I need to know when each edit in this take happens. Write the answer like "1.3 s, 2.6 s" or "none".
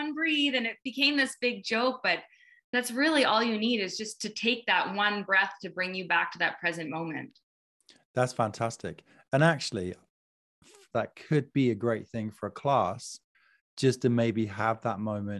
10.9 s